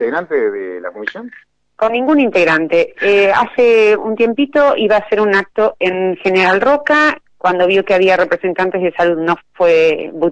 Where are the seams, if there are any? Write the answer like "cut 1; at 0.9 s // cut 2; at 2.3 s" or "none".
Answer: cut 1; at 9.4 s